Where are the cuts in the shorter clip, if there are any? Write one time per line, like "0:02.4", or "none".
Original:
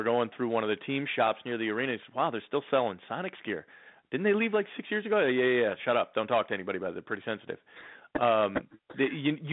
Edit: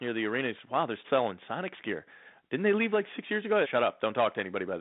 0:01.0
0:03.6